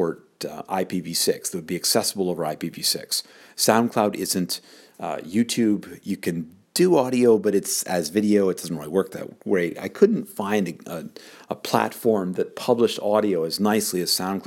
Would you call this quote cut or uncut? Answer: uncut